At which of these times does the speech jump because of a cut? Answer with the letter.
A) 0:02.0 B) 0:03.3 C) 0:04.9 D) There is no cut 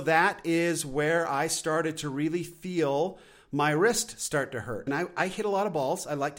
C